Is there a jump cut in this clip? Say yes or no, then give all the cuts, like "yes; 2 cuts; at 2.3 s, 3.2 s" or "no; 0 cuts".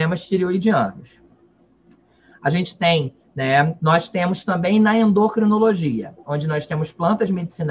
yes; 1 cut; at 3.8 s